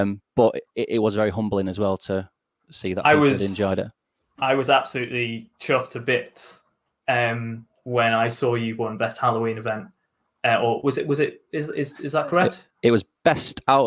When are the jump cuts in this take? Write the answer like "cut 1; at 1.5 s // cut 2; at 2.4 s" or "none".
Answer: none